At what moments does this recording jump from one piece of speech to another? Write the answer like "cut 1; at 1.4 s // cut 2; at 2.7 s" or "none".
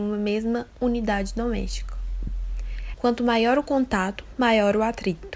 cut 1; at 2.9 s